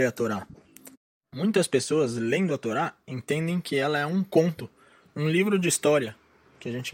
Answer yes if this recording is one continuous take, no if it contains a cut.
yes